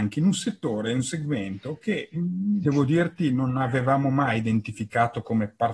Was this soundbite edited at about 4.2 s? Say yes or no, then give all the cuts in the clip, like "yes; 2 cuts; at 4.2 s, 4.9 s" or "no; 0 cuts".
no; 1 cut; at 2.6 s